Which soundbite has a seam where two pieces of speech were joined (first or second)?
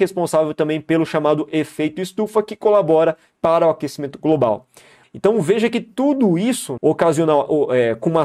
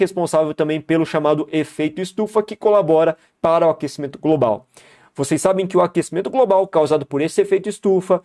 first